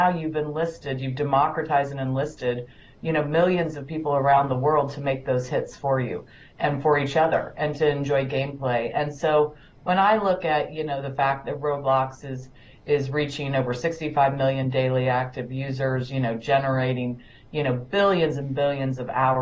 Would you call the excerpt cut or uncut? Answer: uncut